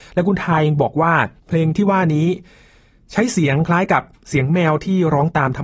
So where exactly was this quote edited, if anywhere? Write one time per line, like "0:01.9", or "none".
0:01.4